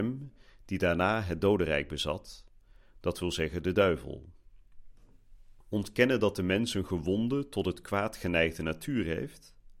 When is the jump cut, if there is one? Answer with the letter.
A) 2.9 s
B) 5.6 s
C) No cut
B